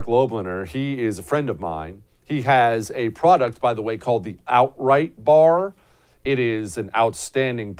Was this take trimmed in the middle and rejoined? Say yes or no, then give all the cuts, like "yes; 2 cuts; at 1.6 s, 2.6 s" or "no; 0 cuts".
no; 0 cuts